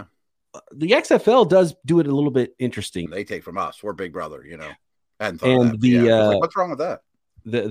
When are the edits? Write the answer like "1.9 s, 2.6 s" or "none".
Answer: 3.1 s